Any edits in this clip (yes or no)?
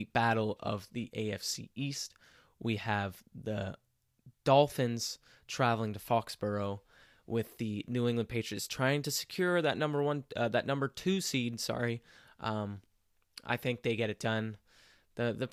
no